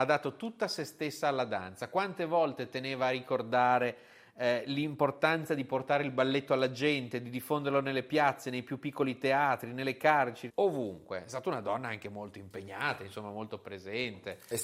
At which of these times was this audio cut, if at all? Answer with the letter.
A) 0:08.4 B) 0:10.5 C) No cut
B